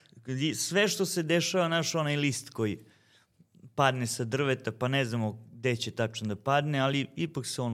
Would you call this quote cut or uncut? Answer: uncut